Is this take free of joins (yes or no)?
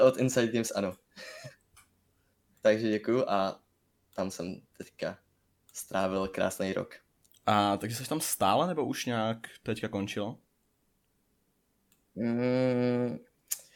yes